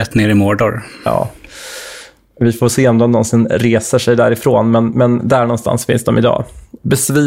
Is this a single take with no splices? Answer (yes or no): yes